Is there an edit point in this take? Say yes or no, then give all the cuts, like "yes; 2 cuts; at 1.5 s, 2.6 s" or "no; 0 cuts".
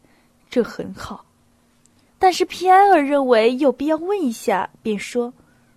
yes; 1 cut; at 2.1 s